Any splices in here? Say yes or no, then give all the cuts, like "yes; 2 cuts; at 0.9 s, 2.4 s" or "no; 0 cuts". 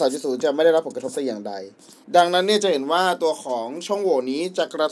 no; 0 cuts